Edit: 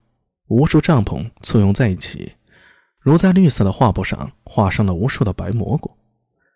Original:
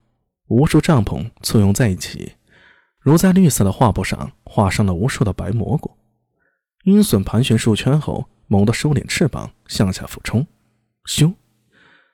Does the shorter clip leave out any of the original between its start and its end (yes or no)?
no